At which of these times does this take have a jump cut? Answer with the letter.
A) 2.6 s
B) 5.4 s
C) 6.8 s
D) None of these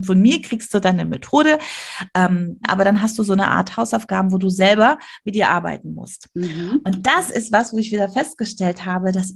A